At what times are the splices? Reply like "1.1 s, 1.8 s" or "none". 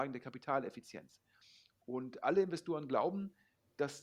none